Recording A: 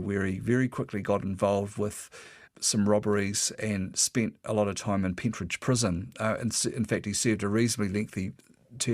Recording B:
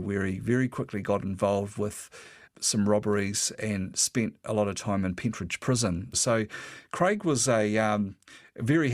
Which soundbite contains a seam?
B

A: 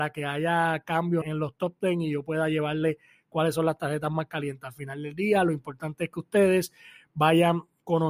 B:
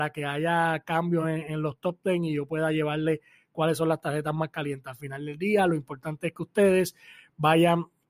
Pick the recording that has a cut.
A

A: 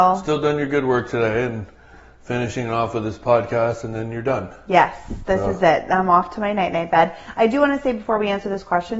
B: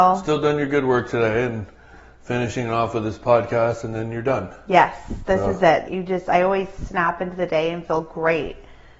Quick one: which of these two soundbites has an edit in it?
B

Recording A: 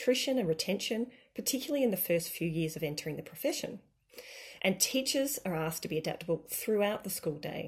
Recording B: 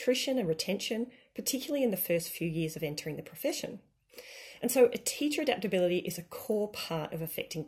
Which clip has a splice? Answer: A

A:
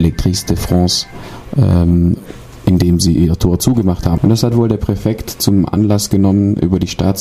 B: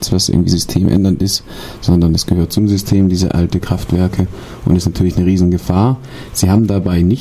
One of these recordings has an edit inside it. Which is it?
A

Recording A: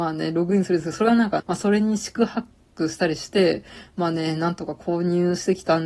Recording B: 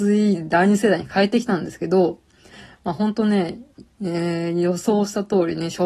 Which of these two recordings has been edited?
A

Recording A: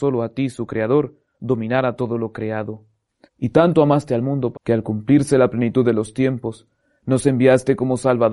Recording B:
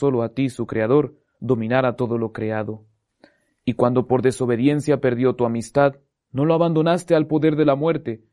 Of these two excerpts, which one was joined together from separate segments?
A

